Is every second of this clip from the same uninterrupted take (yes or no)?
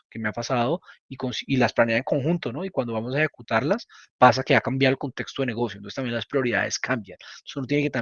yes